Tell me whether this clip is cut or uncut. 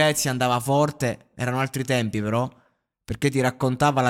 uncut